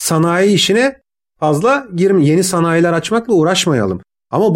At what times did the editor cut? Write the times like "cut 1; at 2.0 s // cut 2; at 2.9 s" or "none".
none

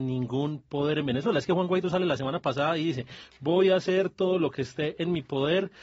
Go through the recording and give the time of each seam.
none

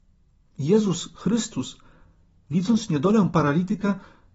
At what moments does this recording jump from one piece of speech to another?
none

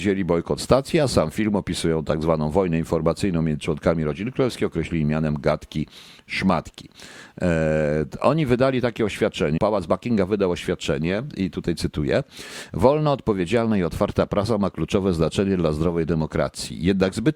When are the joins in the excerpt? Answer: cut 1; at 9.6 s

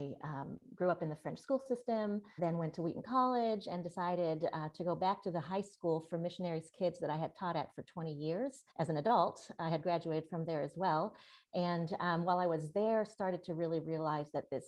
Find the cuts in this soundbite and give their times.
cut 1; at 2.4 s // cut 2; at 8.7 s

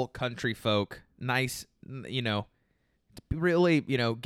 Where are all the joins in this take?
none

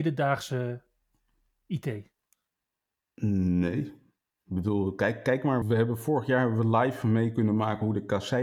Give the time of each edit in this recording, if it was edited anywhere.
cut 1; at 5.6 s

